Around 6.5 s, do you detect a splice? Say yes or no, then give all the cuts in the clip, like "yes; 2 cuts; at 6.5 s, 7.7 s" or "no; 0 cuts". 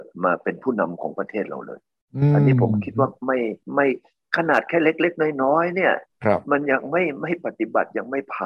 no; 1 cut; at 3.6 s